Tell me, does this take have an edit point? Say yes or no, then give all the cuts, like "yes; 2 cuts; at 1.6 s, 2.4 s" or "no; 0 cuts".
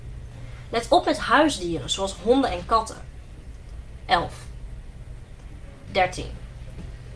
yes; 2 cuts; at 4.0 s, 5.9 s